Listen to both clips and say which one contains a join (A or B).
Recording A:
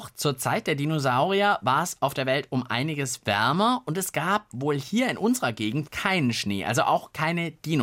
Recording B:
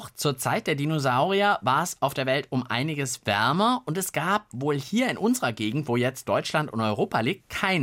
A